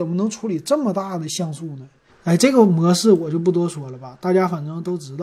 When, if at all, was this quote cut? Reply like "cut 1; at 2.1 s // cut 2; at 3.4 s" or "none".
cut 1; at 2.1 s